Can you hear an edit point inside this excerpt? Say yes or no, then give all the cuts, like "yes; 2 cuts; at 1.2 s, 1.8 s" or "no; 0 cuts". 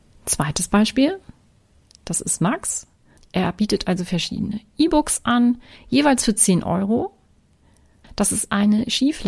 yes; 2 cuts; at 3.2 s, 8.0 s